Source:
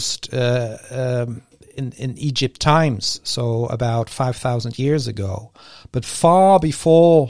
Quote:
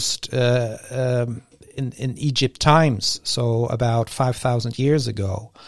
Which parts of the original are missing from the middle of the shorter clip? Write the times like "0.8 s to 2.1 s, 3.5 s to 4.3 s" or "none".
none